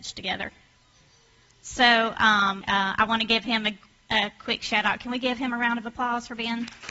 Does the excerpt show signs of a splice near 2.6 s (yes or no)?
yes